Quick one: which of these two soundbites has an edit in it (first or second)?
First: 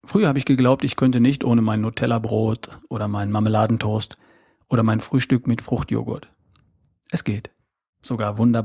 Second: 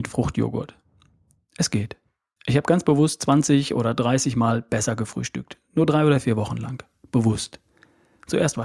second